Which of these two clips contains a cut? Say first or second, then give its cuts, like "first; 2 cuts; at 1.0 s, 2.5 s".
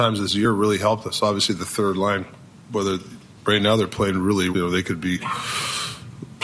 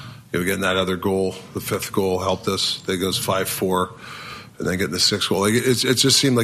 first; 1 cut; at 4.5 s